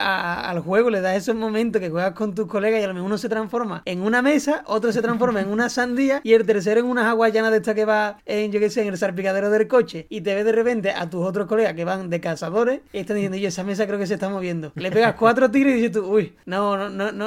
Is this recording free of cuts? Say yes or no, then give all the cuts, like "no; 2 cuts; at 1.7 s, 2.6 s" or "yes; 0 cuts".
yes; 0 cuts